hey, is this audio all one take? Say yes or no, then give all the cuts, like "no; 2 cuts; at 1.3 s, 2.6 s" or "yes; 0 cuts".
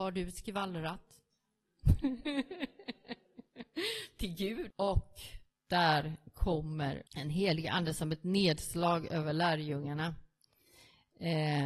no; 2 cuts; at 4.7 s, 7.1 s